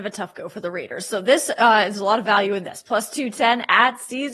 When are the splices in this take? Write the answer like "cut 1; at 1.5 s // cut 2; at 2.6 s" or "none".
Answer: none